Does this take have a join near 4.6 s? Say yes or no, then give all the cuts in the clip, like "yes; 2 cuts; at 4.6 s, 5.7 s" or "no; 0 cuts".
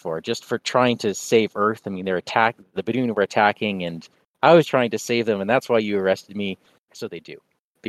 yes; 2 cuts; at 4.6 s, 6.9 s